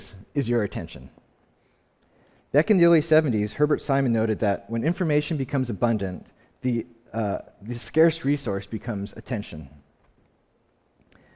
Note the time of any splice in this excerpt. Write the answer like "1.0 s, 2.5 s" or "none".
none